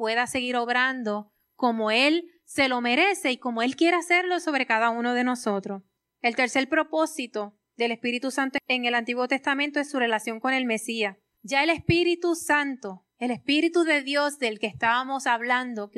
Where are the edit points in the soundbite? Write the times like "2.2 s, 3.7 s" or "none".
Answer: 6.0 s, 11.4 s